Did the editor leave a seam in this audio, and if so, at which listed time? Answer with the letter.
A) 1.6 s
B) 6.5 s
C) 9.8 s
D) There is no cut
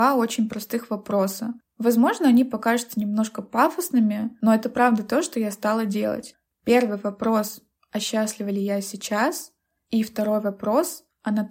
D